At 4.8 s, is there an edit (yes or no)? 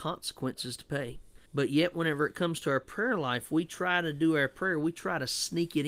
no